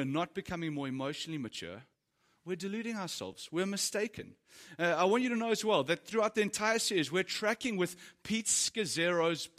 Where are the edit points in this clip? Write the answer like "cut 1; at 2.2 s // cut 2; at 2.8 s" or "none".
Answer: none